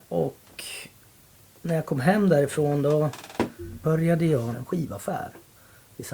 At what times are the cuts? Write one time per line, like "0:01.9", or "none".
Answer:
0:04.5